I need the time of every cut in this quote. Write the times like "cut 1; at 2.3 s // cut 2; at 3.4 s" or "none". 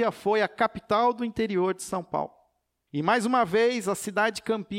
cut 1; at 2.9 s